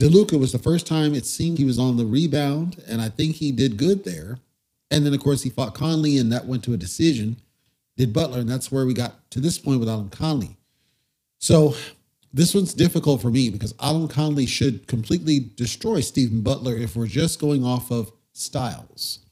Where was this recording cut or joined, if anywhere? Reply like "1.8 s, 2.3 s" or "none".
1.6 s